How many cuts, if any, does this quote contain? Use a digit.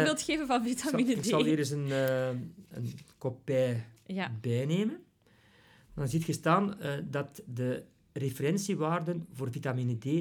0